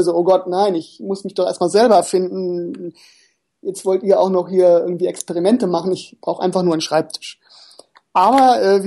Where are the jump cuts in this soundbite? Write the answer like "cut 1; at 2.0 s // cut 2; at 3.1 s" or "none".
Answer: none